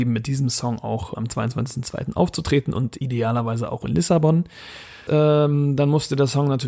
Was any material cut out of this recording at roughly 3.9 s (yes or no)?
no